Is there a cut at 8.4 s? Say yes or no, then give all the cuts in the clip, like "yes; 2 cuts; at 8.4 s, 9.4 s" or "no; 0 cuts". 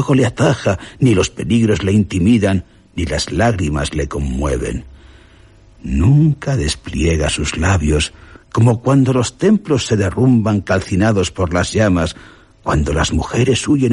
yes; 1 cut; at 8.4 s